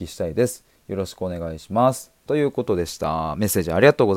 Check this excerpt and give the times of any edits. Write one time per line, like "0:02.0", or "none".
none